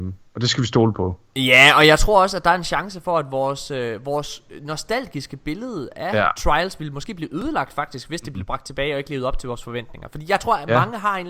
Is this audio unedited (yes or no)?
yes